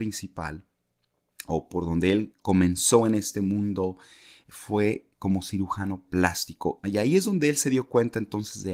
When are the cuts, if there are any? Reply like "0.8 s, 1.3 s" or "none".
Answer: 6.8 s

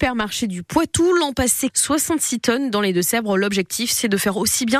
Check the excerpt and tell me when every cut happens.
1.7 s

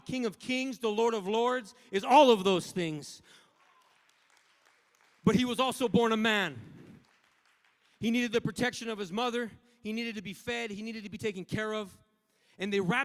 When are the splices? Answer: none

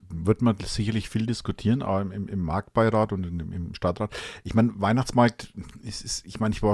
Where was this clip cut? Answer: none

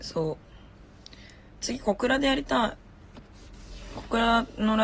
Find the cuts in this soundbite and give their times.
1.6 s

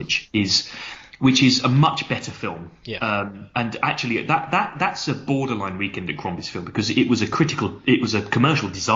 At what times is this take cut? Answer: none

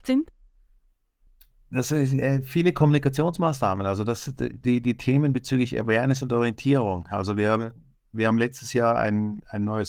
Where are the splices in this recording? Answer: none

